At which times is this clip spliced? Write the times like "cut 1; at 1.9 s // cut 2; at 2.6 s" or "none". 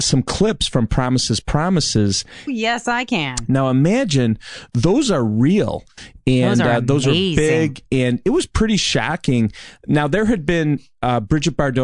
cut 1; at 2.5 s